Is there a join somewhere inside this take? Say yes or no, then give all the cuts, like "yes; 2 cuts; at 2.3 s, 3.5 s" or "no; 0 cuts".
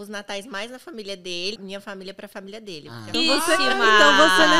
yes; 2 cuts; at 1.6 s, 3.1 s